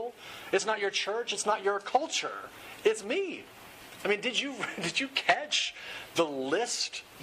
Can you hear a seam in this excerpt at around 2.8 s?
yes; 1 cut; at 2.8 s

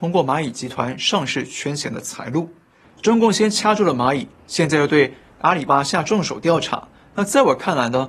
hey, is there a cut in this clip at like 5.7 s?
yes; 1 cut; at 5.7 s

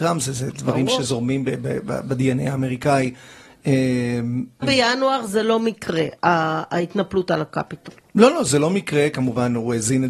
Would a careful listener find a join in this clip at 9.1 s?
no; 1 cut; at 4.6 s

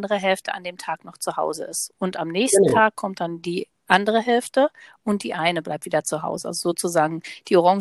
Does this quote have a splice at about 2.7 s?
no; 0 cuts

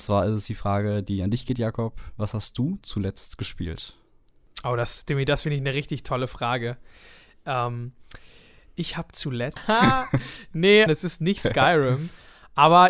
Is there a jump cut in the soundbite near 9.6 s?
yes; 2 cuts; at 9.6 s, 10.9 s

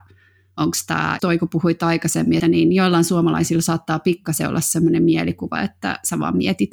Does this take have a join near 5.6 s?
yes; 3 cuts; at 1.2 s, 2.4 s, 5.6 s

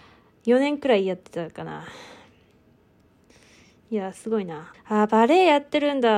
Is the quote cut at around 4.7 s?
yes; 1 cut; at 4.7 s

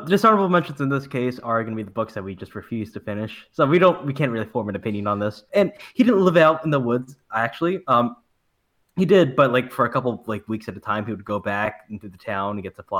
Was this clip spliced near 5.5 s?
yes; 1 cut; at 5.5 s

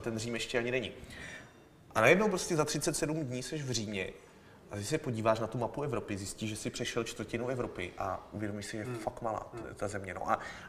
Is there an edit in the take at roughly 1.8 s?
no; 0 cuts

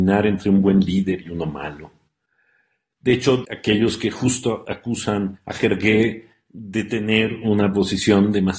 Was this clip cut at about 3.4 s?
yes; 1 cut; at 3.4 s

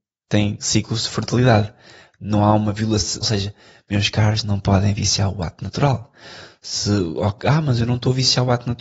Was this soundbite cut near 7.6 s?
no; 1 cut; at 3.2 s

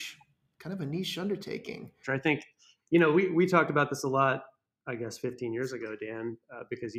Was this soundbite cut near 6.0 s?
no; 1 cut; at 2.0 s

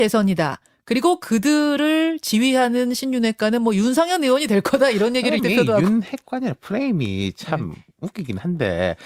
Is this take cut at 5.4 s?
yes; 1 cut; at 5.4 s

